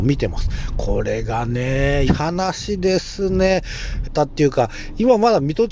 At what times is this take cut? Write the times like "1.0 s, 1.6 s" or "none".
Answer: 2.1 s, 4.0 s